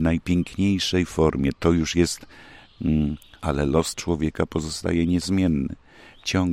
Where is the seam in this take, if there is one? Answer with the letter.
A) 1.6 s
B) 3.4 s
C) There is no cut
B